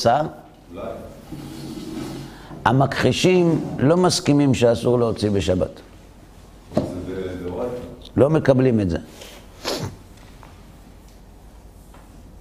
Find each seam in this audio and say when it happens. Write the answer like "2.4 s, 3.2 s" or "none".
none